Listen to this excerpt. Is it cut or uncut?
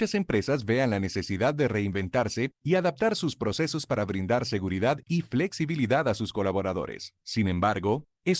uncut